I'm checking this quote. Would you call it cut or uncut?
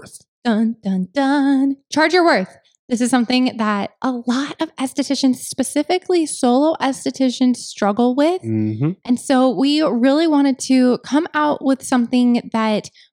uncut